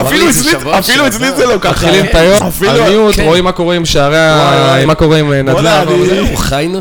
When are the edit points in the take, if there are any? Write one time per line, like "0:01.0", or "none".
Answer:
0:02.4
0:04.9